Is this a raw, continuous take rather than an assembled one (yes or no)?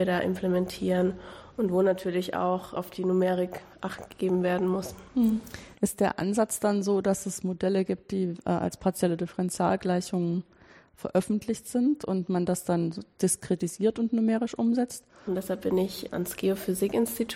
no